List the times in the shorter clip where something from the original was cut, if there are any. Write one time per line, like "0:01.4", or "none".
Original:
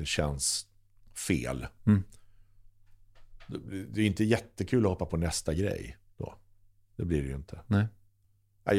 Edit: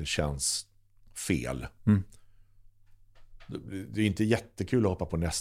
none